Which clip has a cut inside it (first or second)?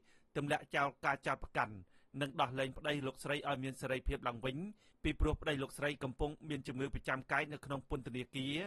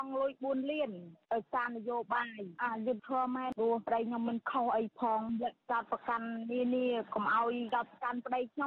second